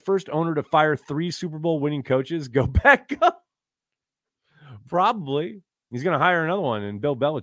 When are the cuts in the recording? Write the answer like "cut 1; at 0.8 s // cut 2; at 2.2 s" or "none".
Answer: none